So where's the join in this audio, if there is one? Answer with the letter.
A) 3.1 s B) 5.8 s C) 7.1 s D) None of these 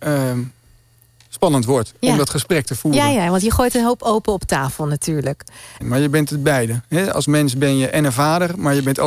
B